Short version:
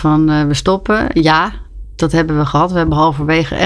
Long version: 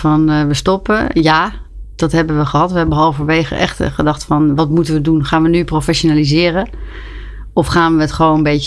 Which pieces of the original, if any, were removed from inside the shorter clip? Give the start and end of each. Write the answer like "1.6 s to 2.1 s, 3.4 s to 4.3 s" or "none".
none